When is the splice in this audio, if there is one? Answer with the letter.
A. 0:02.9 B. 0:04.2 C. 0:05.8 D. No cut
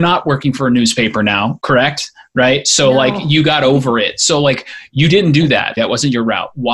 C